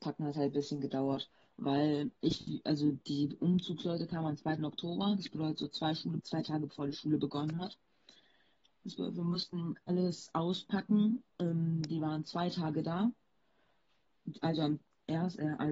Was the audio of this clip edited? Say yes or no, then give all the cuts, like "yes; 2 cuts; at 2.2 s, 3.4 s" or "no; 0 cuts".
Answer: yes; 2 cuts; at 2.2 s, 6.2 s